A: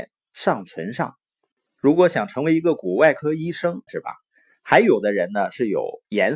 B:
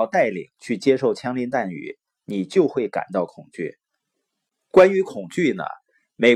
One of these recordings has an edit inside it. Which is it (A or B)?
A